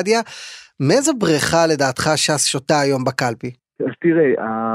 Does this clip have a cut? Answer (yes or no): yes